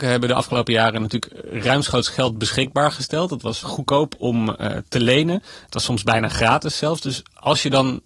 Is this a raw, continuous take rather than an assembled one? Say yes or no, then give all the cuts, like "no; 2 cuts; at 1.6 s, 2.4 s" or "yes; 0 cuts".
no; 1 cut; at 3.6 s